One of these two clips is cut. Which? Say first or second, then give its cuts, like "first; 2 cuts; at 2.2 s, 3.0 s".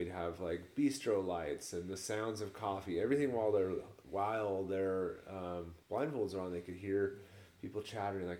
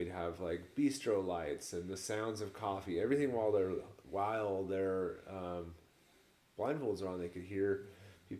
first; 1 cut; at 5.8 s